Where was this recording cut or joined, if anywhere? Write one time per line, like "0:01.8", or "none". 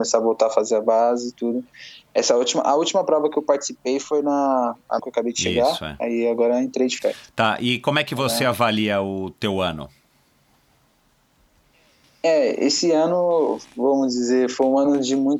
0:05.0